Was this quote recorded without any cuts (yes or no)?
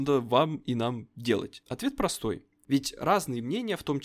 no